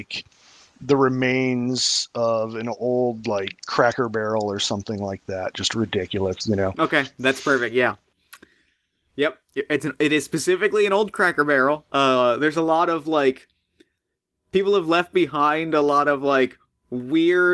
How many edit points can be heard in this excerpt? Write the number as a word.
zero